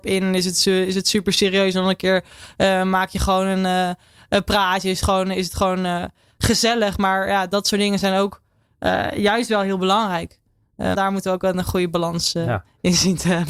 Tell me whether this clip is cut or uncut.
cut